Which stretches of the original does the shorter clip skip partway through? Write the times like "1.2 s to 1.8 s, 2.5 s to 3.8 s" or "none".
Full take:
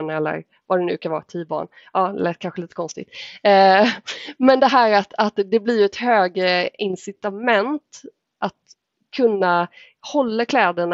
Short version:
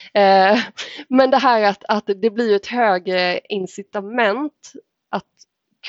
none

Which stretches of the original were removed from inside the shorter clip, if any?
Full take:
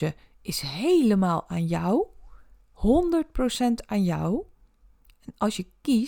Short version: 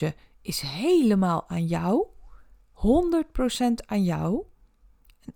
none

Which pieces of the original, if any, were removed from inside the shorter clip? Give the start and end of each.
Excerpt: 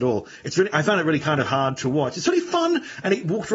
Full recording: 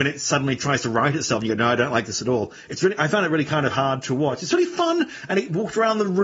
none

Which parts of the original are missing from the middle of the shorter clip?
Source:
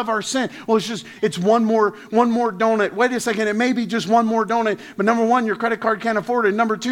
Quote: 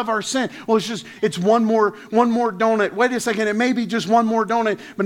none

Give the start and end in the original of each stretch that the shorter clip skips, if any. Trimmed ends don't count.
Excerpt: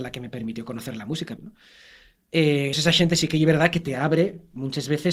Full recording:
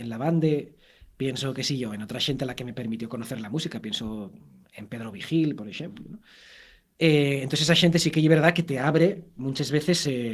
3.8 s to 6.0 s, 7.4 s to 7.6 s

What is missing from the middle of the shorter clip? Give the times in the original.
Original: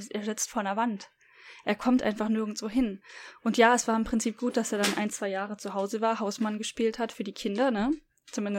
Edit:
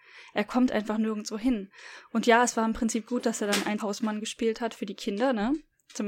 5.1 s to 6.2 s

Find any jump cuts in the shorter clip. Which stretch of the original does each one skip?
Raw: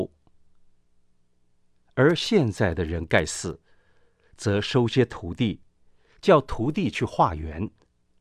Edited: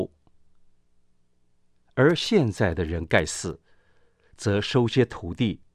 none

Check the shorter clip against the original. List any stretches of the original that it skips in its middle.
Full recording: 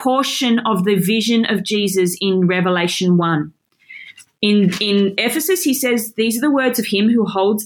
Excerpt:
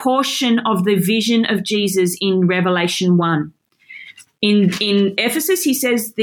none

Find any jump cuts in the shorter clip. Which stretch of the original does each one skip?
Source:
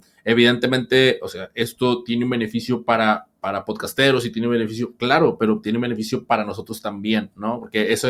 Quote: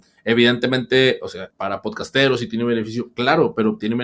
1.5 s to 3.3 s

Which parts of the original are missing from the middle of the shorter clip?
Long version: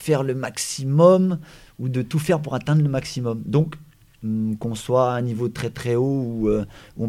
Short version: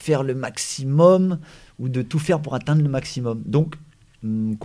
none

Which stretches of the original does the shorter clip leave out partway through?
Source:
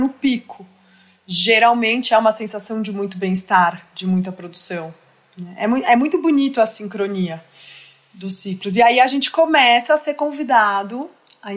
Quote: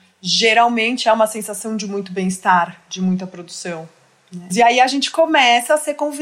5.6 s to 8.7 s

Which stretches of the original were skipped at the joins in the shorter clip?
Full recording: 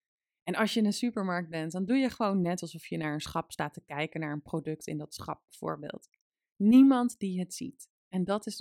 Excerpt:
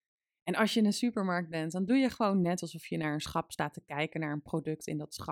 none

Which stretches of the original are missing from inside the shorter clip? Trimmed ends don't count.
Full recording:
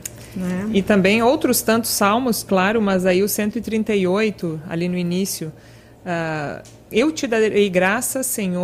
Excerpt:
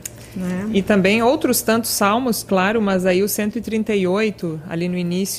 none

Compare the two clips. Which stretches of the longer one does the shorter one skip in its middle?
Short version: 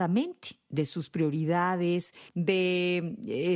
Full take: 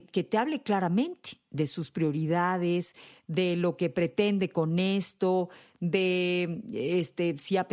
3.1 s to 5.7 s

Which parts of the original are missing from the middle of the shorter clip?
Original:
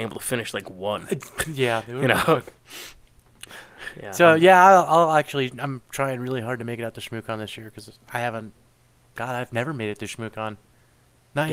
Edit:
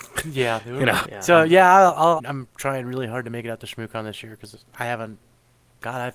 2.2 s to 3.9 s, 5.1 s to 5.5 s

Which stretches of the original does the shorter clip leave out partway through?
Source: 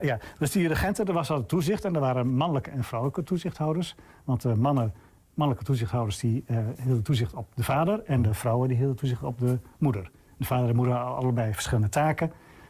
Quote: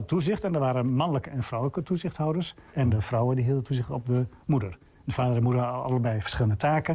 4.1 s to 8.1 s

